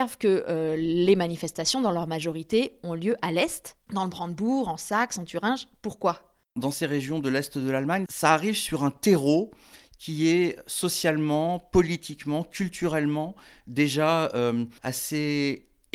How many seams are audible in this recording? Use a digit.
0